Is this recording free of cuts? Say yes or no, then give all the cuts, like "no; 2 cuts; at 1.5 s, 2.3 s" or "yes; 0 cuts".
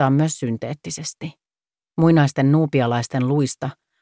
no; 1 cut; at 1.9 s